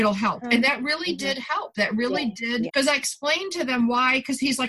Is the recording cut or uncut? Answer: cut